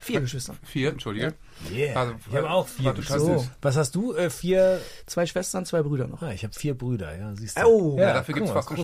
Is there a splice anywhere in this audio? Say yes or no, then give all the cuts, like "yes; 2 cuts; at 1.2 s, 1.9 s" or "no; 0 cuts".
no; 0 cuts